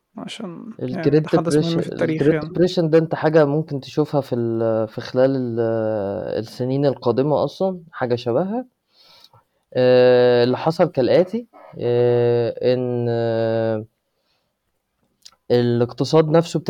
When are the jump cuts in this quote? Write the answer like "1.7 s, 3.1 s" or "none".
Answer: none